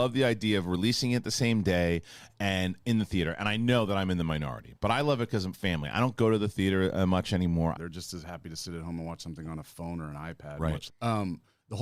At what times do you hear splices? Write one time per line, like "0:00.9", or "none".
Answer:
0:07.8
0:10.9